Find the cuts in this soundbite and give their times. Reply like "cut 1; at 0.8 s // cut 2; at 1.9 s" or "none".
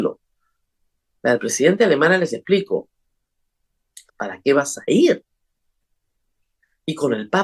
cut 1; at 1.1 s // cut 2; at 4.1 s